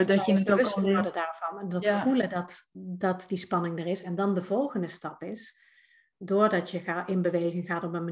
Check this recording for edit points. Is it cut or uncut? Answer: uncut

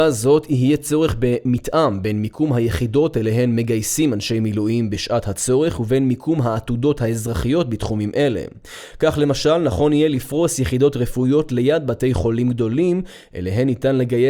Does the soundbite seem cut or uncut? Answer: uncut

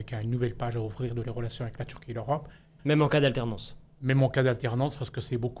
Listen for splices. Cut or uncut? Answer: cut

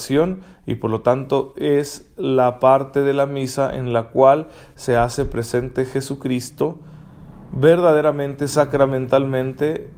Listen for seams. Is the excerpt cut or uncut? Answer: uncut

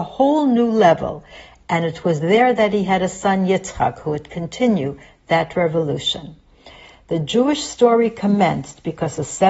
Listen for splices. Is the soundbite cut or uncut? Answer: uncut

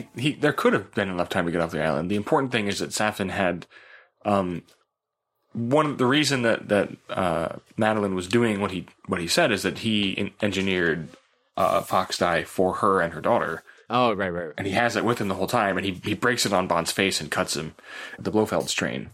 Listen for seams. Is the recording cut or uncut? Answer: cut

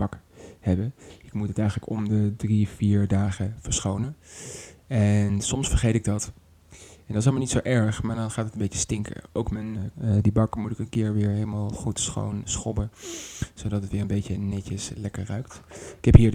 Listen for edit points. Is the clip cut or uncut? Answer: cut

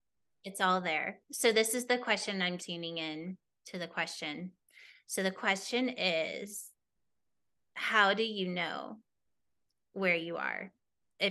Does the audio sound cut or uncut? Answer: cut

